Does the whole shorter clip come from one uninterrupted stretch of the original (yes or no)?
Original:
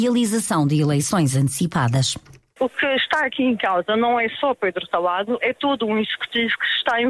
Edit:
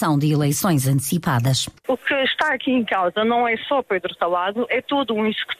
no